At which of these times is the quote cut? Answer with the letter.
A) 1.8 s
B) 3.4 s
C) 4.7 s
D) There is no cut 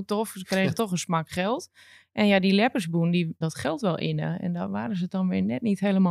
B